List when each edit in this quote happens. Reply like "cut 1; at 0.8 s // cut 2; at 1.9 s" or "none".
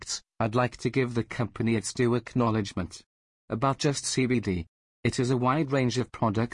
cut 1; at 3.3 s // cut 2; at 5.0 s